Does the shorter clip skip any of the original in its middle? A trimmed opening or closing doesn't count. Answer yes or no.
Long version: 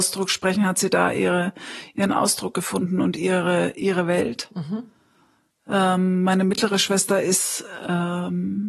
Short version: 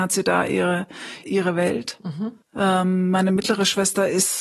yes